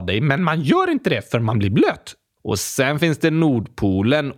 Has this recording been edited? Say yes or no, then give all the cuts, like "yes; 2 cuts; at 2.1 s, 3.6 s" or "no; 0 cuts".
yes; 1 cut; at 2.4 s